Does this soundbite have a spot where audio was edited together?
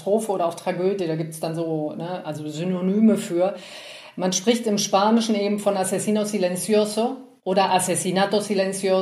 no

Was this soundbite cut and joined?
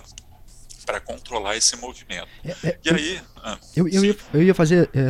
no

